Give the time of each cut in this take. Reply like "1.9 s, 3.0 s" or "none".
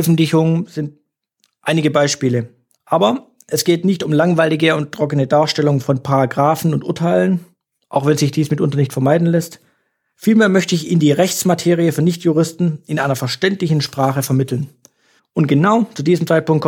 2.8 s, 15.2 s